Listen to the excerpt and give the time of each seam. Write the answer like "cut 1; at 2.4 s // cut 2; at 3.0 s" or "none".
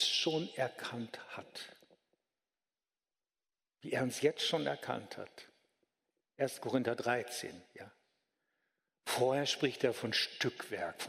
none